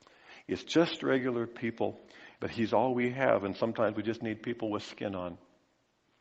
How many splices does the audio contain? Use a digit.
1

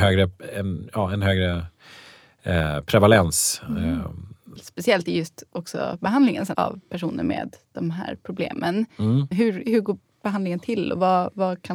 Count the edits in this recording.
3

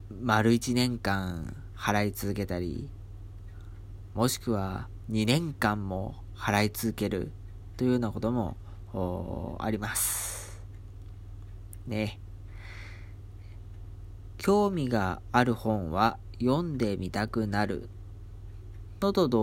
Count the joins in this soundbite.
0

